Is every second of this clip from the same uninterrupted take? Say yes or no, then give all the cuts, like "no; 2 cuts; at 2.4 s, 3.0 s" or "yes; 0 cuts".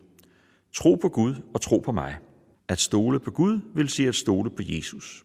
no; 1 cut; at 2.6 s